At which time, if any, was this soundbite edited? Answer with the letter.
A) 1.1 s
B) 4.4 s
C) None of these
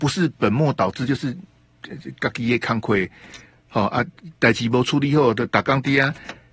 C